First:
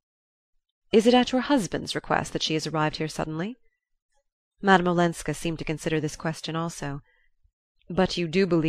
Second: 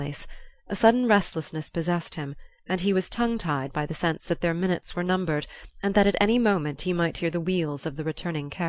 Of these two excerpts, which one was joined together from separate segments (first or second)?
first